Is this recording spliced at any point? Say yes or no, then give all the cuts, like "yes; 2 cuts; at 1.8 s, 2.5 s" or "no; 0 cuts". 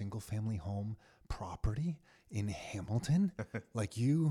no; 0 cuts